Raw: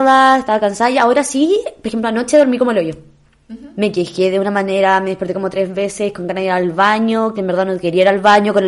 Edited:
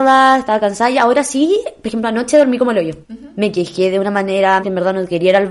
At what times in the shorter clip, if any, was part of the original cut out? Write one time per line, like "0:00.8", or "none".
0:03.0
0:04.6